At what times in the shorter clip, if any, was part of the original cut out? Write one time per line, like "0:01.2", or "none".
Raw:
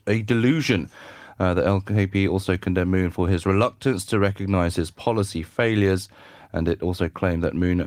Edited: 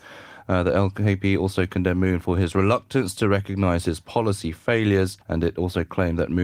0:05.2